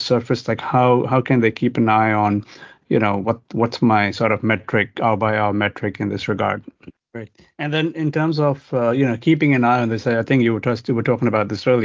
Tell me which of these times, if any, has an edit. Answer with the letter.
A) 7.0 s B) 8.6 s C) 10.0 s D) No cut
A